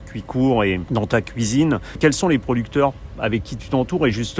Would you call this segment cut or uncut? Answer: uncut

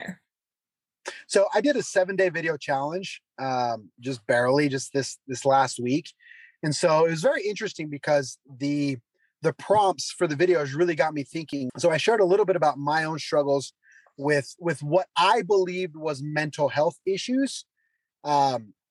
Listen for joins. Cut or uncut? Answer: cut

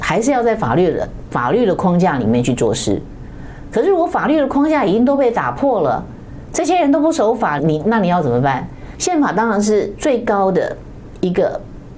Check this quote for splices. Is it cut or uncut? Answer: cut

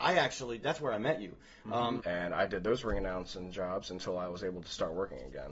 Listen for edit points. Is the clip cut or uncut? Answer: cut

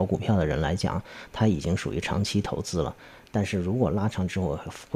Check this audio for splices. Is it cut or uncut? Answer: uncut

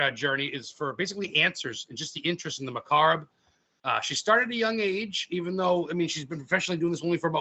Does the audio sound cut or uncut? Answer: uncut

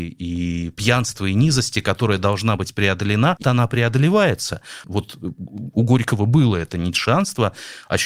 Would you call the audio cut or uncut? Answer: cut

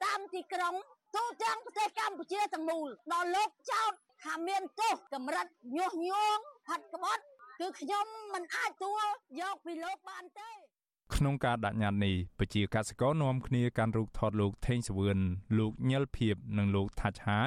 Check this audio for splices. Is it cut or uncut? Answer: cut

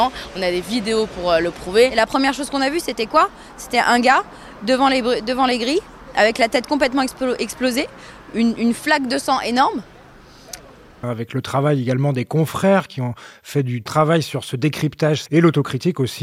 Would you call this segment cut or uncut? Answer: cut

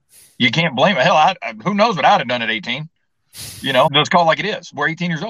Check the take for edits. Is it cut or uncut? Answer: cut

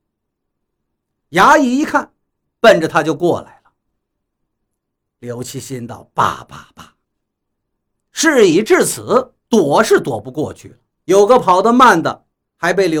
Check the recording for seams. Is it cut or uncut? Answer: cut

